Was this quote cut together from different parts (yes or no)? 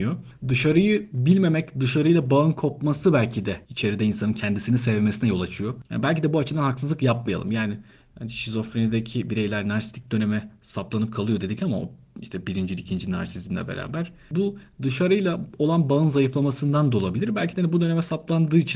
no